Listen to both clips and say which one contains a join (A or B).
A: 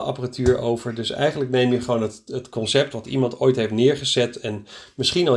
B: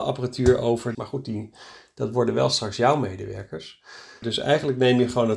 B